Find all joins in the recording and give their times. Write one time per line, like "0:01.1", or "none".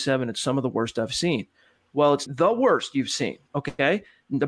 0:02.3